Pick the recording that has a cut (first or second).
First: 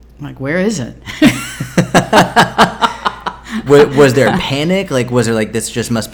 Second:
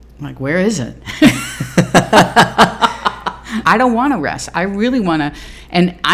second